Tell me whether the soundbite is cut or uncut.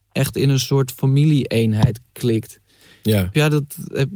uncut